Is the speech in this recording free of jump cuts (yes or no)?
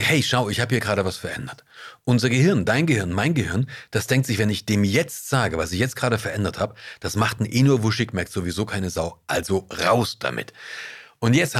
yes